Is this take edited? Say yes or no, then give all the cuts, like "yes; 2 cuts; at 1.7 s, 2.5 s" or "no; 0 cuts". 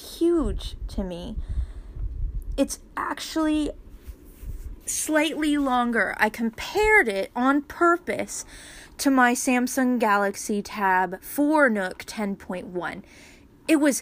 no; 0 cuts